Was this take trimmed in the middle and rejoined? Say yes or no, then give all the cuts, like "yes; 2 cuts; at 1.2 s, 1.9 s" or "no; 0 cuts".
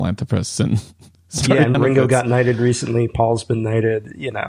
yes; 1 cut; at 1.7 s